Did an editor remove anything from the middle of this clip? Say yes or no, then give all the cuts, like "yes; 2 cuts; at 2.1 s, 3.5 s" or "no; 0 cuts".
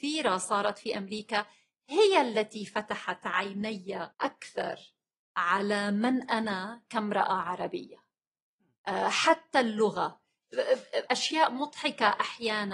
yes; 2 cuts; at 4.1 s, 11.1 s